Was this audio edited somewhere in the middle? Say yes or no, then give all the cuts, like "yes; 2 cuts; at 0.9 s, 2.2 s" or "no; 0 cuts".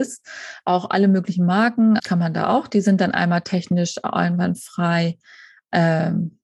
yes; 1 cut; at 2.0 s